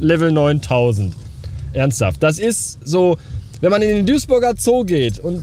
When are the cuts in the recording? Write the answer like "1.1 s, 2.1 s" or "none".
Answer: none